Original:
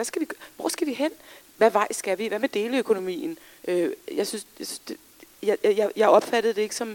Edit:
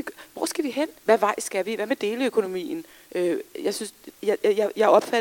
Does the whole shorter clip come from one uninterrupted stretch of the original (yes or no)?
no